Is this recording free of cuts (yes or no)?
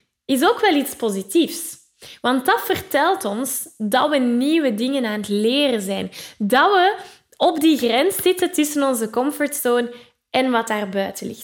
yes